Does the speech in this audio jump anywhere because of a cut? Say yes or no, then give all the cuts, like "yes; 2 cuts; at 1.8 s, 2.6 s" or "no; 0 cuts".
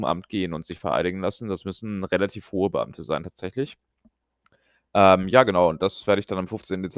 no; 0 cuts